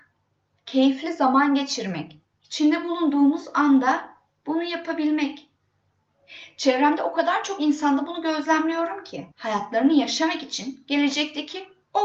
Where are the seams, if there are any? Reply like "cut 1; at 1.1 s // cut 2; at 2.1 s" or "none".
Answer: cut 1; at 2.3 s // cut 2; at 9.3 s